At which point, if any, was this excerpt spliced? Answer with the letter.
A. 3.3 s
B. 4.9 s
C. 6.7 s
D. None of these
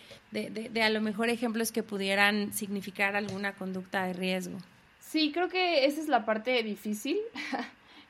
B